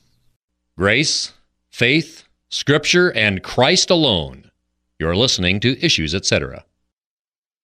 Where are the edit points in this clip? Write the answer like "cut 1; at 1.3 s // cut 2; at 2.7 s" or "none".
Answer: none